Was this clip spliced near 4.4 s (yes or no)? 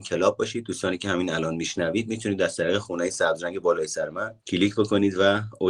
yes